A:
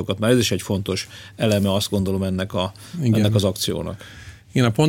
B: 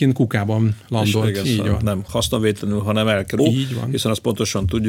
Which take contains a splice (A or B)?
B